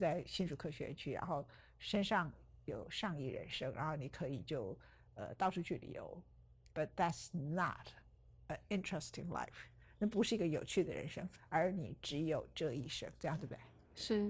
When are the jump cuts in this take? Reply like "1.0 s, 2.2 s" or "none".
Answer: none